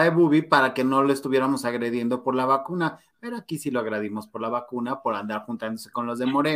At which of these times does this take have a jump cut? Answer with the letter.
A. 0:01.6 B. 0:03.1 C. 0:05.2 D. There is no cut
D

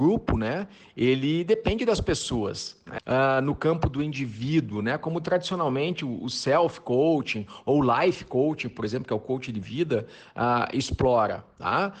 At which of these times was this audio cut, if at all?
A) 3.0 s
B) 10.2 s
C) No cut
A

